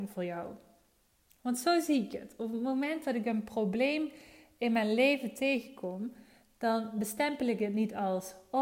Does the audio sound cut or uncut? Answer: uncut